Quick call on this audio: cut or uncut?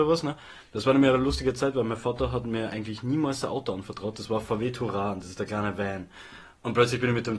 uncut